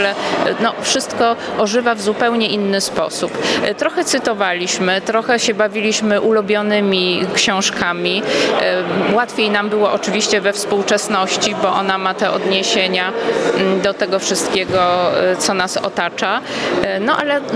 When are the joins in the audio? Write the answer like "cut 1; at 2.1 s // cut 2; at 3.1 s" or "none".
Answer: none